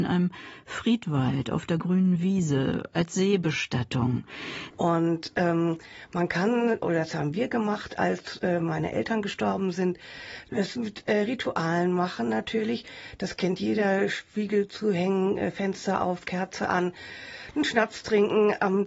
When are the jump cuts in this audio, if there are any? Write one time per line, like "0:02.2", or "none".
0:04.7